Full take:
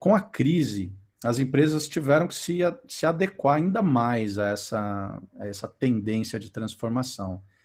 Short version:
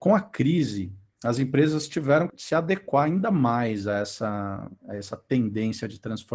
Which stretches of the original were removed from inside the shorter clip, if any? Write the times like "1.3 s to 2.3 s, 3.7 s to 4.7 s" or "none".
2.3 s to 2.8 s